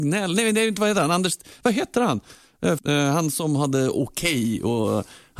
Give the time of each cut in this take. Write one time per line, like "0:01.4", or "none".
0:02.8